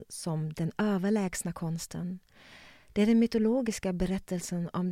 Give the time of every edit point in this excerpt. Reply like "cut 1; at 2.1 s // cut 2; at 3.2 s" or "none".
none